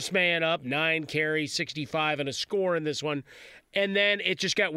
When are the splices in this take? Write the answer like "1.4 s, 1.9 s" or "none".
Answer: none